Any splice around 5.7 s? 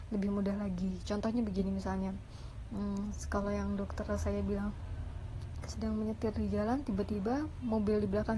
yes; 1 cut; at 5.7 s

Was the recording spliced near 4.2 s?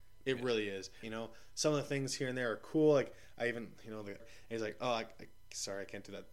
yes; 2 cuts; at 1.0 s, 4.2 s

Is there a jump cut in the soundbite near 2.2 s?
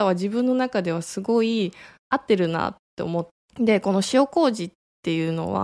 no; 1 cut; at 3.4 s

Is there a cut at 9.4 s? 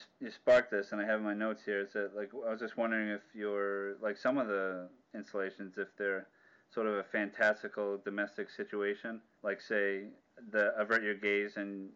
yes; 1 cut; at 9.4 s

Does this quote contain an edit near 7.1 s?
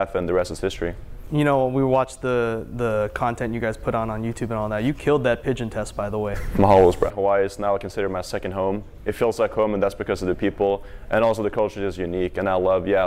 yes; 1 cut; at 7.1 s

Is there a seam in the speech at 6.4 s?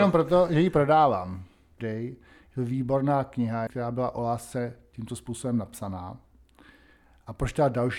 no; 2 cuts; at 1.8 s, 3.7 s

